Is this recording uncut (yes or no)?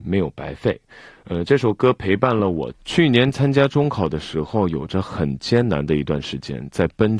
yes